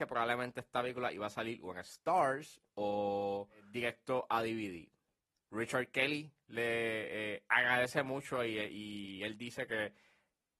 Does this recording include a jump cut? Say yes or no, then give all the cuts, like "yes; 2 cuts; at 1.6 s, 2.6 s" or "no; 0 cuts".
no; 0 cuts